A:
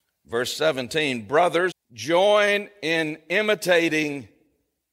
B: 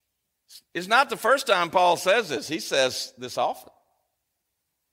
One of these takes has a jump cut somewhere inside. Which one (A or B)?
A